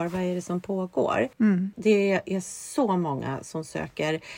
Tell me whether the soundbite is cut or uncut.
cut